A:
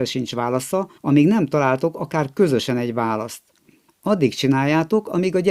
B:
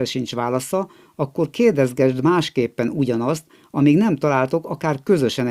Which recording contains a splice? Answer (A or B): A